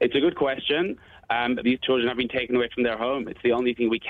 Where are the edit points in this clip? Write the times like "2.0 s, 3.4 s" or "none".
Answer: 1.6 s